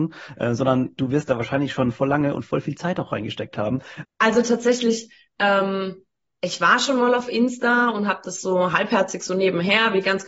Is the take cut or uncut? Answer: cut